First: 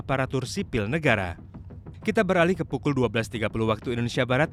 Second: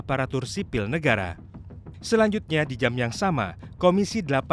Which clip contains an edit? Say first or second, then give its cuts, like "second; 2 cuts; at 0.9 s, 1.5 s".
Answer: second; 1 cut; at 2.0 s